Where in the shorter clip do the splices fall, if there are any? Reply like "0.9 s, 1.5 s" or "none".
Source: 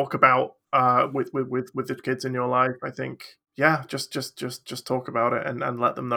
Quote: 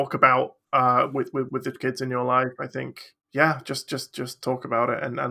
1.5 s, 4.4 s